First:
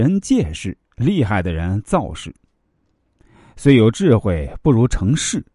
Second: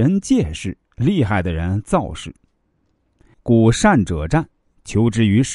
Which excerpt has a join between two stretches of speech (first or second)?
second